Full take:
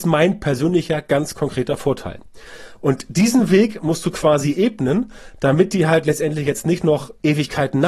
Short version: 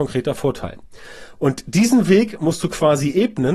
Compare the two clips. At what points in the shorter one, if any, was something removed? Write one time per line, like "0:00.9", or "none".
none